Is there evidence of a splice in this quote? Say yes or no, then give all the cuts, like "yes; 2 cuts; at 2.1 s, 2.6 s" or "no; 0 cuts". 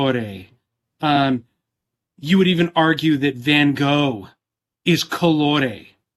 no; 0 cuts